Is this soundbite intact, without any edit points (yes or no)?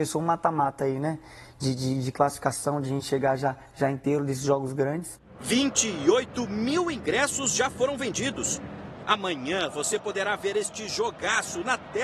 yes